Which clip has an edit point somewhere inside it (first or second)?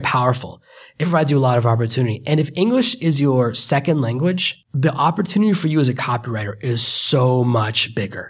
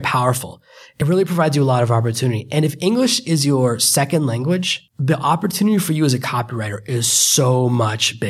first